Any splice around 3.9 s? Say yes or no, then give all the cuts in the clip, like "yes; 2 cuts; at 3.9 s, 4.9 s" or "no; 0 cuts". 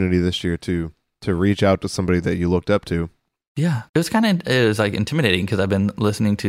yes; 1 cut; at 3.9 s